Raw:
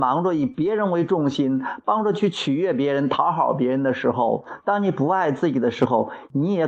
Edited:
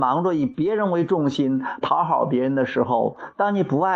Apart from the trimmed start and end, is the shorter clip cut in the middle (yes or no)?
yes